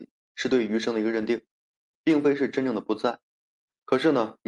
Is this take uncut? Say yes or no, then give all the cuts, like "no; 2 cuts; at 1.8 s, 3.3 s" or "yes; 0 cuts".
yes; 0 cuts